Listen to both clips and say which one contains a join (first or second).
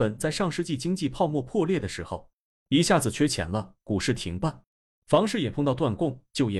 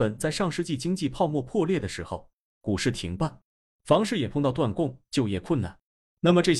second